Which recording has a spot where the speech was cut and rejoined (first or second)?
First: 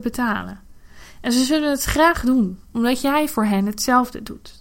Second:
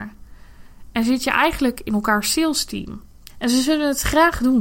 second